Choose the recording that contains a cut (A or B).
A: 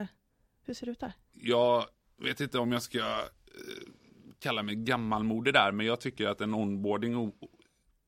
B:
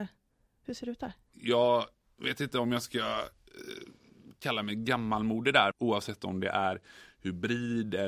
B